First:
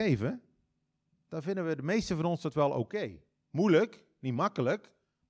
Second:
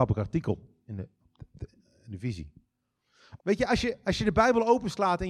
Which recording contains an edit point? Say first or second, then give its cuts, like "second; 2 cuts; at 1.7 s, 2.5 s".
second; 1 cut; at 3.4 s